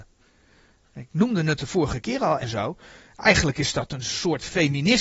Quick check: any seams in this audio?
yes; 1 cut; at 2.4 s

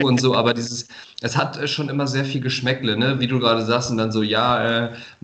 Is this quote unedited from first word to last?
yes; 0 cuts

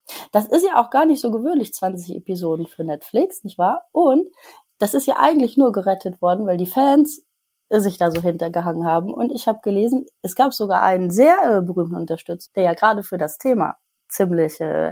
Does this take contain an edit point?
yes; 1 cut; at 12.5 s

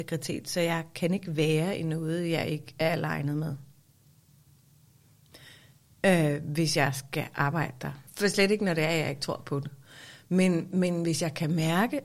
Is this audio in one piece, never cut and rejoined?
no; 1 cut; at 8.1 s

